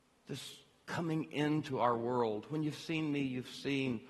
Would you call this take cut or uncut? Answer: uncut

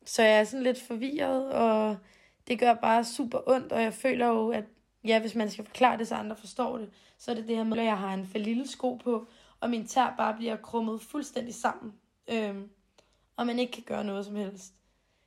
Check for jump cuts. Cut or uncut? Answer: cut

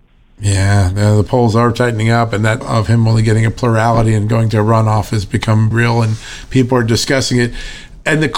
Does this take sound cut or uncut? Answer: cut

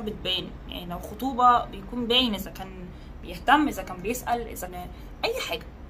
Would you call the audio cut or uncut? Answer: cut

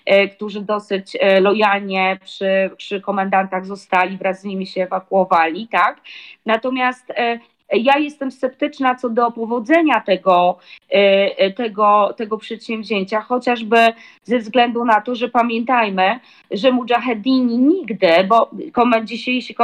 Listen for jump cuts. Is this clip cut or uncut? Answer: uncut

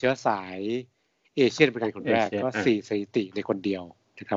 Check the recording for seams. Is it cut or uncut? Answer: uncut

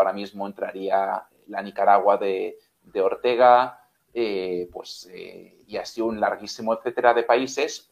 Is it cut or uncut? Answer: uncut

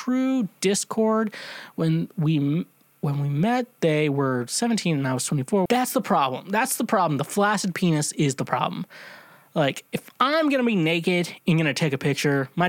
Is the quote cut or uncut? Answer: cut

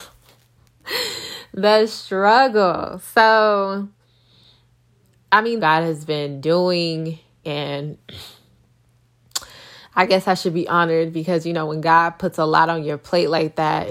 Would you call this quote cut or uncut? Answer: cut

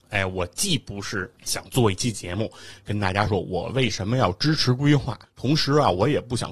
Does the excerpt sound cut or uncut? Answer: cut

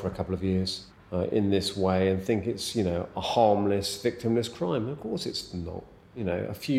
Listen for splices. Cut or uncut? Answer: cut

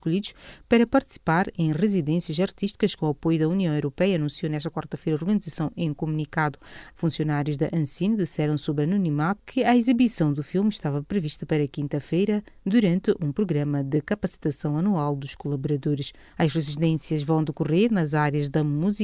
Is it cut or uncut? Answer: cut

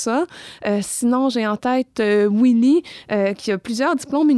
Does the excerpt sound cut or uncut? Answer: uncut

